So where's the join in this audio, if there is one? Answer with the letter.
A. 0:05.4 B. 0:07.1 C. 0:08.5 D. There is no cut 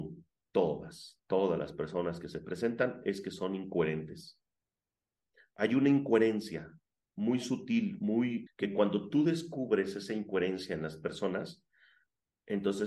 C